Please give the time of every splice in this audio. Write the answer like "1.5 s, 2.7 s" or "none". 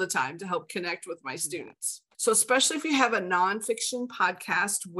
2.1 s